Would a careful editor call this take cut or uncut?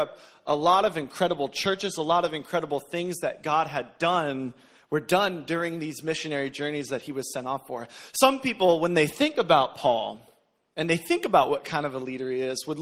uncut